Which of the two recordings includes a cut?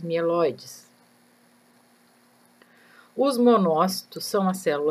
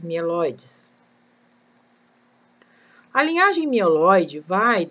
second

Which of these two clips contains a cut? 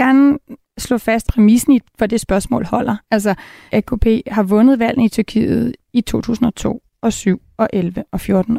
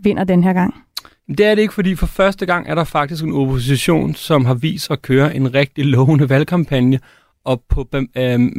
first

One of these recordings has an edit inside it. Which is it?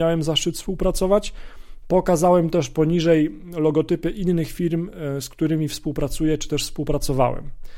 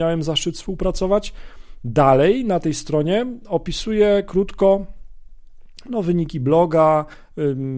second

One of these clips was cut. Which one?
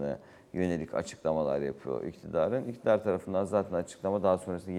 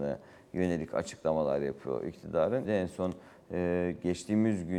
second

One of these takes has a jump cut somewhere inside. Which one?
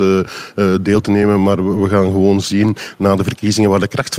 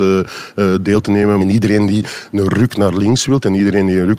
second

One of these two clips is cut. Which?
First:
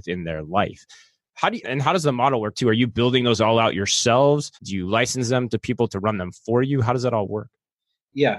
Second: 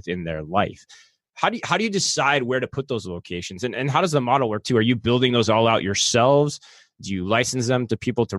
first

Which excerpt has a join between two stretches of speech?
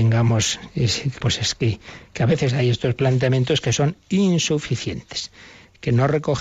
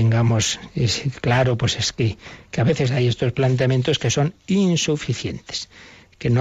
first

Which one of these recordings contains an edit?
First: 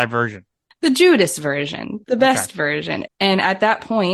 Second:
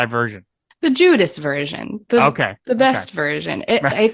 first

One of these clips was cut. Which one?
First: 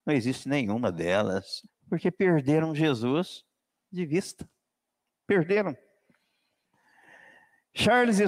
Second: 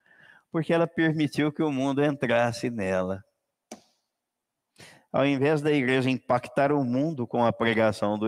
first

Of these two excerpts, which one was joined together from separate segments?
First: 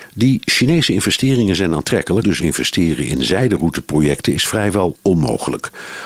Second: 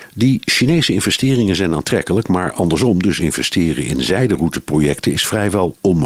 first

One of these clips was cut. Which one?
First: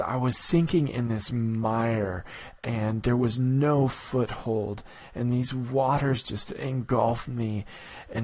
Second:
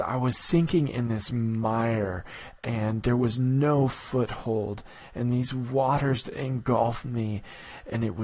second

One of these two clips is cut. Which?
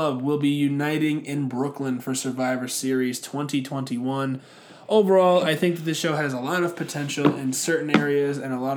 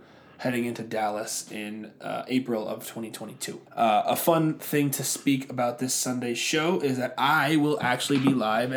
second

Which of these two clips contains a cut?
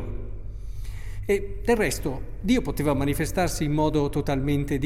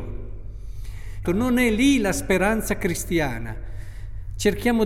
second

